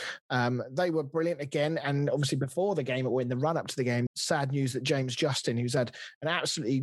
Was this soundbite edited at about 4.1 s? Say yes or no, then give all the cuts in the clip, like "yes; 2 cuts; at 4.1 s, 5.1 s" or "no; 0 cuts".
yes; 1 cut; at 4.1 s